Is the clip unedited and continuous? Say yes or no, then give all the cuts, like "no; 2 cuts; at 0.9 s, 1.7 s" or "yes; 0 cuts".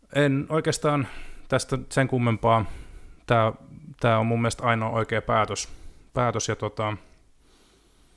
yes; 0 cuts